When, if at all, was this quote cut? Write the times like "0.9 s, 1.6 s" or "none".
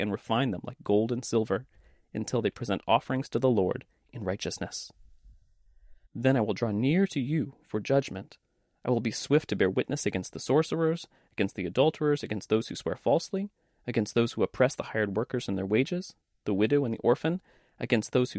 6.1 s